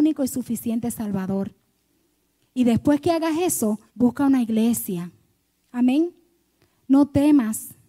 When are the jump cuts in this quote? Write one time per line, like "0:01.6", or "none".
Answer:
0:03.9
0:05.6